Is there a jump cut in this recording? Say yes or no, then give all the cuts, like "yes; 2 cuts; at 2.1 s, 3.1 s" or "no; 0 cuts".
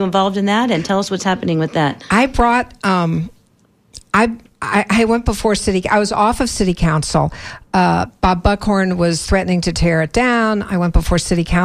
no; 0 cuts